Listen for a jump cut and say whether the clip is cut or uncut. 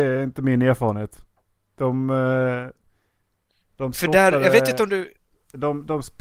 uncut